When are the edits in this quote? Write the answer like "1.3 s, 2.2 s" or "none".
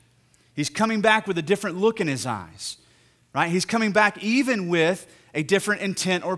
none